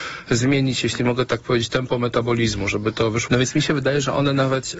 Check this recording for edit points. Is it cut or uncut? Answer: cut